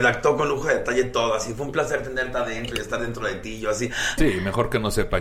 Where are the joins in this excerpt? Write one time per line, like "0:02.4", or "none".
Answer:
0:04.2